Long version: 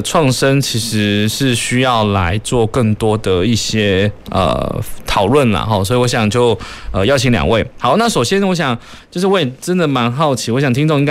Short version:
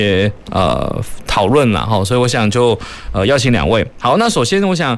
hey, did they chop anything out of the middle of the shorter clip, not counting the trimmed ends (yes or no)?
no